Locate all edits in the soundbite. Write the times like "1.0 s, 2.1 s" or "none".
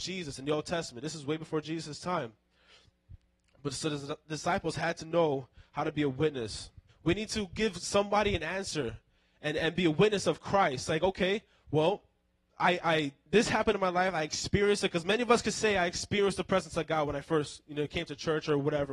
6.9 s

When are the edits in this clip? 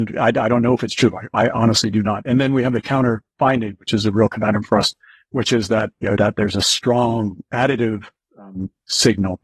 6.2 s

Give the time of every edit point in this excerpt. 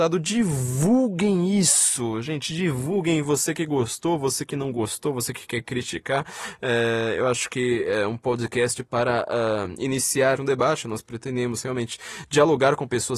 10.4 s

